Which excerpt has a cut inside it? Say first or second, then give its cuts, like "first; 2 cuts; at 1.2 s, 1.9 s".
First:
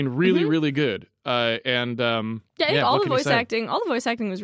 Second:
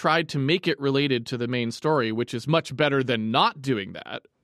first; 1 cut; at 2.5 s